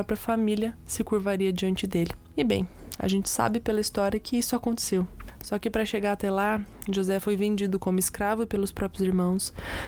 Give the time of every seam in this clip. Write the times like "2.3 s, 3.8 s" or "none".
none